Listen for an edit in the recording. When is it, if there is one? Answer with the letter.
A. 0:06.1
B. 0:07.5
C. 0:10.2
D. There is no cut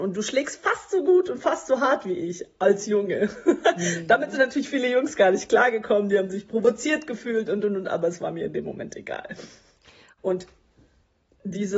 C